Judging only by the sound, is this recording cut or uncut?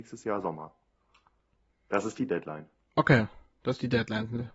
uncut